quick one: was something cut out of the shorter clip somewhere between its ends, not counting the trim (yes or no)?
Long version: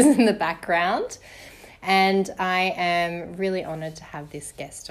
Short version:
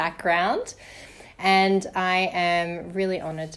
no